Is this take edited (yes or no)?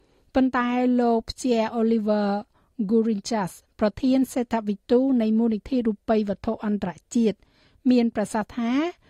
no